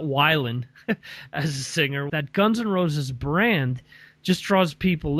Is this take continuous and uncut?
no; 1 cut; at 2.1 s

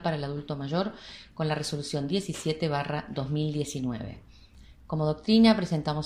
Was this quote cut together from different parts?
no; 0 cuts

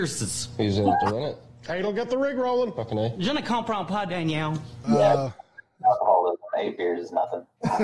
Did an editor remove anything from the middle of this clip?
yes; 1 cut; at 4.8 s

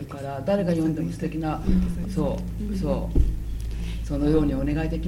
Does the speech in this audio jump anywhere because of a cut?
yes; 1 cut; at 2.1 s

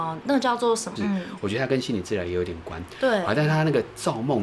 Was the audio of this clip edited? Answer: yes; 1 cut; at 1.0 s

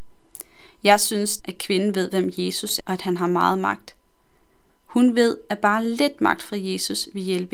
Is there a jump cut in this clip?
yes; 2 cuts; at 1.4 s, 2.8 s

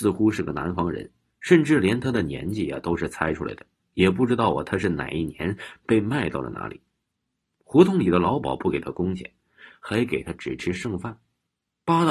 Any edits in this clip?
yes; 1 cut; at 9.7 s

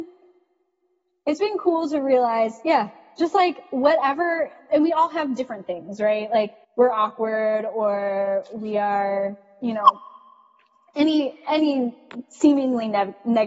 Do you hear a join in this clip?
yes; 1 cut; at 6.6 s

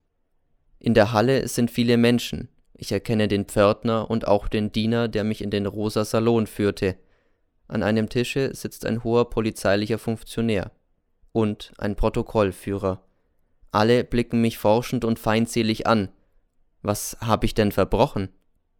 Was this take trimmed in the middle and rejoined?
no; 0 cuts

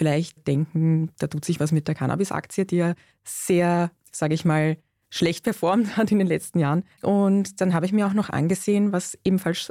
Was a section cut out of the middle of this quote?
yes; 1 cut; at 6.9 s

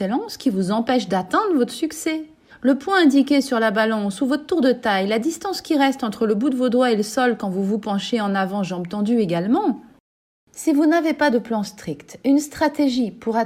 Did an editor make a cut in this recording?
yes; 1 cut; at 2.5 s

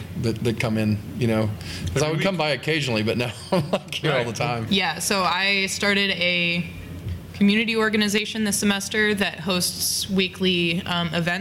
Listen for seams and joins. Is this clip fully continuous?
no; 1 cut; at 4.7 s

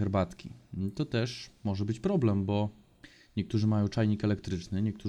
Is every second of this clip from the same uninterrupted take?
yes; 0 cuts

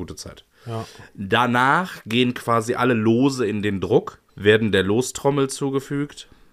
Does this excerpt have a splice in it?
yes; 1 cut; at 4.3 s

